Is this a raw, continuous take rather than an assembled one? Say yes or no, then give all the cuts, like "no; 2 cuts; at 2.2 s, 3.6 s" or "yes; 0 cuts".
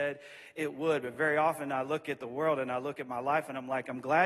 yes; 0 cuts